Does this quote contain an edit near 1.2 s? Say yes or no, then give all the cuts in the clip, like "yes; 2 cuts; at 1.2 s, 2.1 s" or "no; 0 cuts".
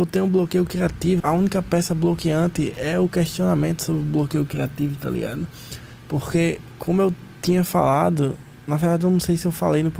yes; 1 cut; at 1.2 s